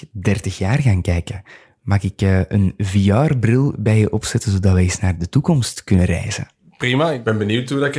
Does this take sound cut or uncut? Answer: uncut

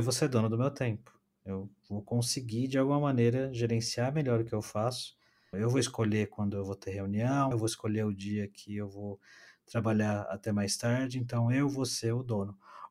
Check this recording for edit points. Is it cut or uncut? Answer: cut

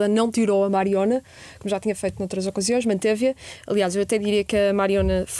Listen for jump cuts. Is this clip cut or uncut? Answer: uncut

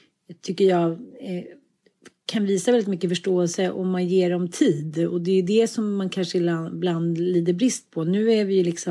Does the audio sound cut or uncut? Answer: uncut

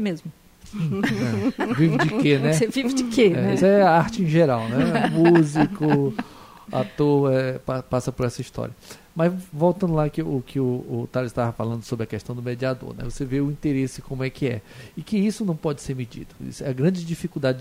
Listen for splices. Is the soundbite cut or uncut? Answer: uncut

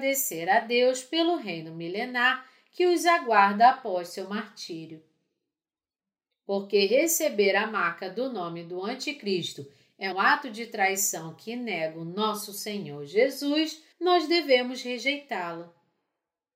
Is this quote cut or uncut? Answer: cut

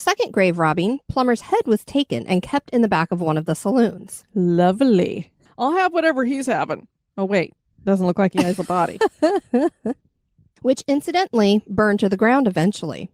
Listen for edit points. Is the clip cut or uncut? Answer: uncut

